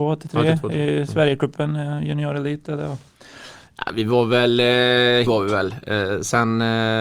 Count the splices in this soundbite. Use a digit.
2